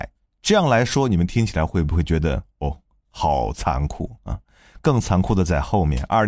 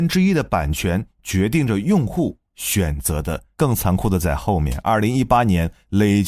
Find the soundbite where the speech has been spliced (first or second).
second